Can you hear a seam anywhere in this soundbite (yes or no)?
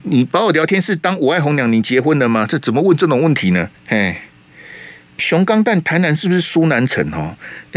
yes